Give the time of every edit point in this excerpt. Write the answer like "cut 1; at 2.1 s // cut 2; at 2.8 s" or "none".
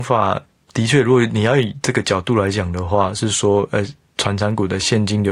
none